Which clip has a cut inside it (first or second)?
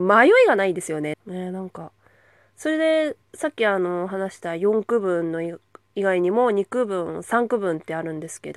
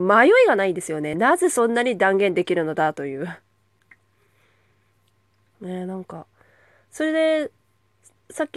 first